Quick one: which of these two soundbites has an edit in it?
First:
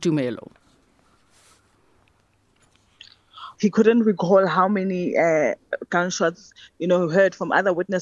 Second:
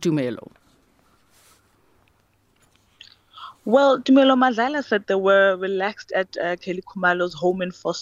first; 1 cut; at 3.5 s

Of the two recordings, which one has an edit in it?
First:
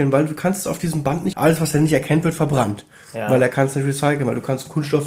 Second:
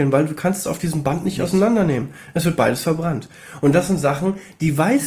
first; 1 cut; at 1.3 s

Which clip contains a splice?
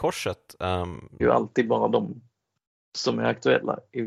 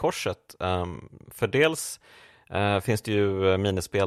first; 1 cut; at 1.2 s

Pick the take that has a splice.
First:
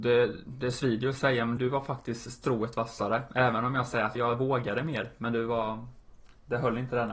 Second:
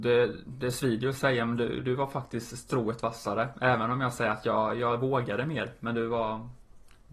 first; 2 cuts; at 1.6 s, 4.2 s

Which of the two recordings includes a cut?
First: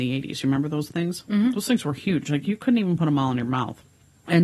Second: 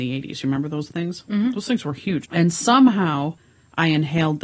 second; 1 cut; at 2.2 s

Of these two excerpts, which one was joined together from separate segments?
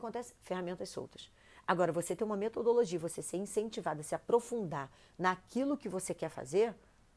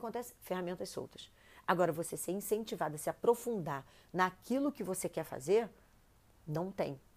second; 1 cut; at 1.9 s

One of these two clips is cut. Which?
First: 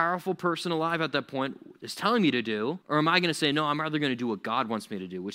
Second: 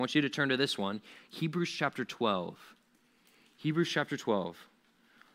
first; 1 cut; at 2.8 s

